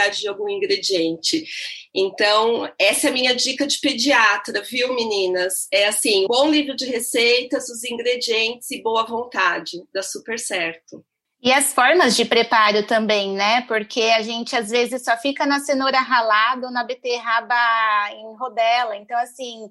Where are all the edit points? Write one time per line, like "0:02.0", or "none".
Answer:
0:06.3
0:11.2